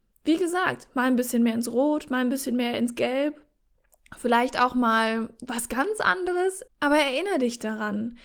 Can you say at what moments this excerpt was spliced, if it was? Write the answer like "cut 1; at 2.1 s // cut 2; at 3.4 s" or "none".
cut 1; at 6.7 s